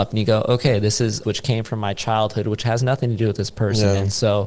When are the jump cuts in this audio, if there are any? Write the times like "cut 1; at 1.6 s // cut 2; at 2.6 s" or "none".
cut 1; at 1.2 s